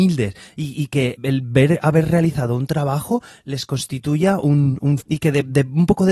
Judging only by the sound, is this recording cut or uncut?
cut